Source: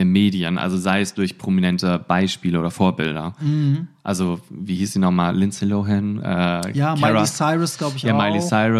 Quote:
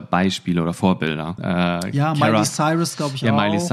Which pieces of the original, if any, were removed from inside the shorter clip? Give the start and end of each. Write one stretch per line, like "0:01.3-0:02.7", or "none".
0:03.4-0:06.2